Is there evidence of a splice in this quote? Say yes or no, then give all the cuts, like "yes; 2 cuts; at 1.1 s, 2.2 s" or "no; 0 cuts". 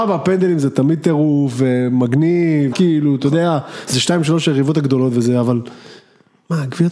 yes; 1 cut; at 2.7 s